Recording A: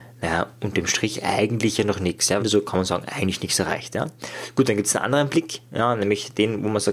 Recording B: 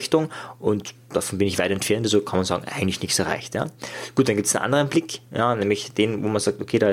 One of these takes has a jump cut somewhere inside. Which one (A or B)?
A